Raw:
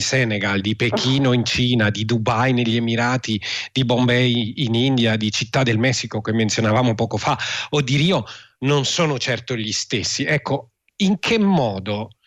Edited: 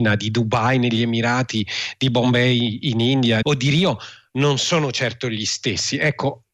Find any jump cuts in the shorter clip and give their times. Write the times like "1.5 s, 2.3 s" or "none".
3.4 s

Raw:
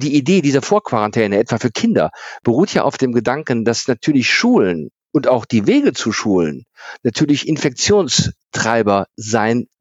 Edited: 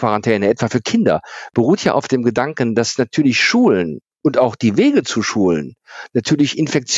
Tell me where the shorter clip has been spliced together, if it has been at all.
none

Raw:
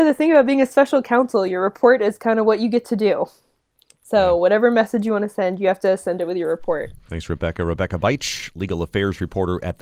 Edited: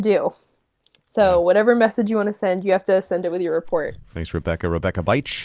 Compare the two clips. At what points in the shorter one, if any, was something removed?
none

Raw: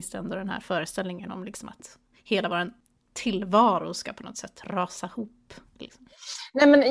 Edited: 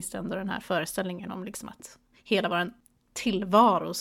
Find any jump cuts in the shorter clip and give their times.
none

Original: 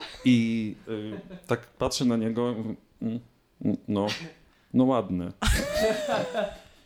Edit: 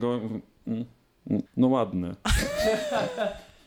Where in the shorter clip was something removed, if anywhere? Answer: 1.4 s

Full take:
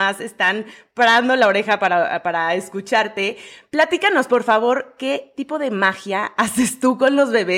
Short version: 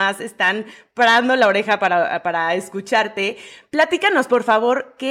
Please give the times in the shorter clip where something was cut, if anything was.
none

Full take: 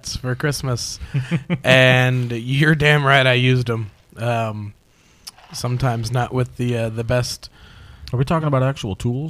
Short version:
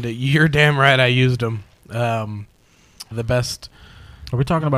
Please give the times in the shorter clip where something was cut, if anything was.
3.1 s

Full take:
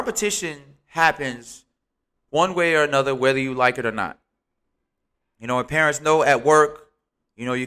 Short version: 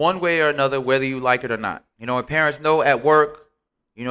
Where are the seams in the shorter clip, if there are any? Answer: 1.9 s

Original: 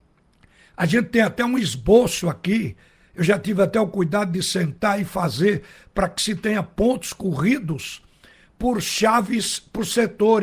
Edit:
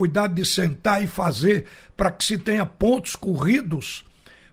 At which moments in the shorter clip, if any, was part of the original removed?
none

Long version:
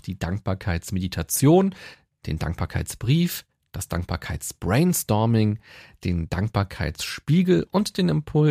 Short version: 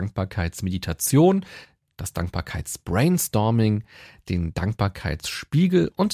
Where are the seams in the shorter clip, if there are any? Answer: 1.9 s

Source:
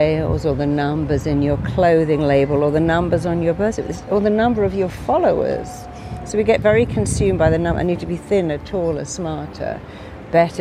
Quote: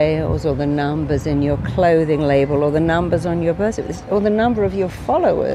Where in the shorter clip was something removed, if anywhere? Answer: none

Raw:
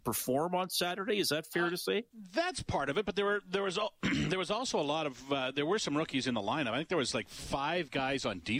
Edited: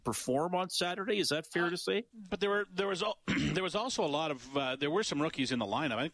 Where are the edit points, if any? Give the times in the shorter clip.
2.3 s

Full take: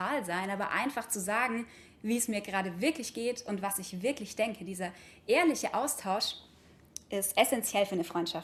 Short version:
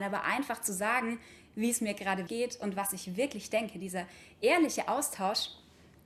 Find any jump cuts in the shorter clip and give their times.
2.3 s

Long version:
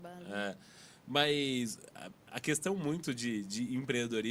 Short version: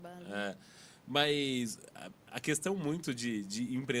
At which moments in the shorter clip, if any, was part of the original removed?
none

